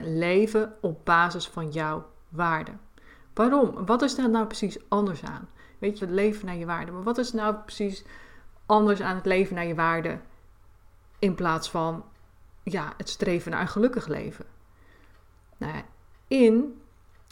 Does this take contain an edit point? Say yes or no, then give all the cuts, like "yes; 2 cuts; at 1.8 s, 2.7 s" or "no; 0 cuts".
yes; 1 cut; at 6.0 s